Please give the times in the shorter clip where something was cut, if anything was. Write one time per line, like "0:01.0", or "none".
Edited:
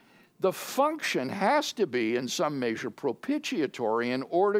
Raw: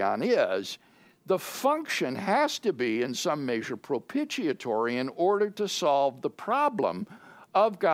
none